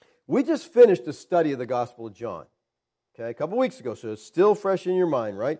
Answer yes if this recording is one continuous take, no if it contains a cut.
yes